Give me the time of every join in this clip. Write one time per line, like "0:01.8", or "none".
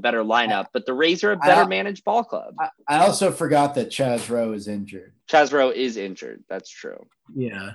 none